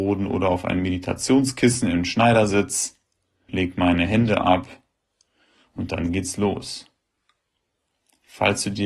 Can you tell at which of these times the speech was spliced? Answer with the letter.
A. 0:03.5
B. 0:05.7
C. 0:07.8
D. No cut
A